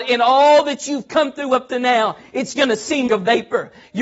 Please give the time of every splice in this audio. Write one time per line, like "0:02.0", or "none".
0:03.1